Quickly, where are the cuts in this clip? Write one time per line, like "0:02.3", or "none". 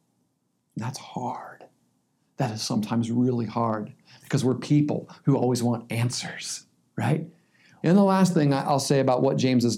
0:07.8